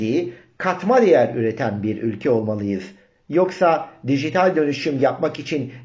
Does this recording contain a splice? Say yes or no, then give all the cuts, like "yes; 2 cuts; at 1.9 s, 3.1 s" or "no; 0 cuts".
no; 0 cuts